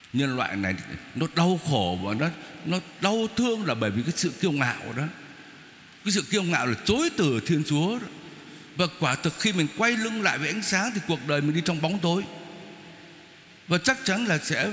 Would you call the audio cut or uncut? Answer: uncut